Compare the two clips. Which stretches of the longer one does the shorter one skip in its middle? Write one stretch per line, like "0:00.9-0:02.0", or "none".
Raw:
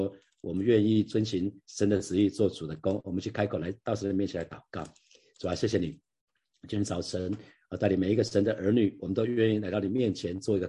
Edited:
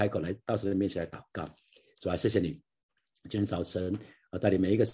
none